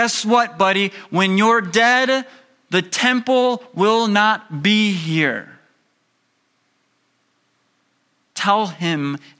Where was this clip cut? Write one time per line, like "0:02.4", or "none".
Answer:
none